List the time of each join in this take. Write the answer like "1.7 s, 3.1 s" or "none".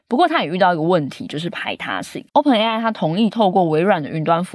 2.3 s